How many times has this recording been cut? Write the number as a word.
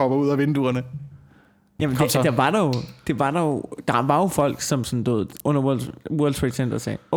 one